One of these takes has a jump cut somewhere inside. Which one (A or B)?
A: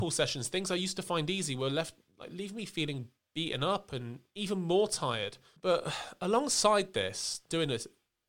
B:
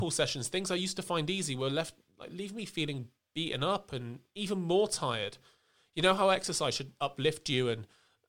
A